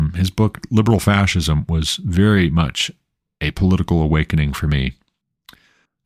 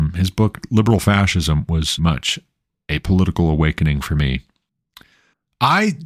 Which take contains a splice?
second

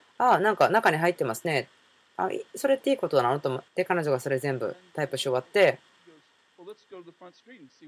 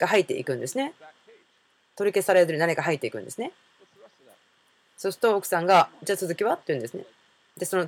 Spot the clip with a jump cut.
first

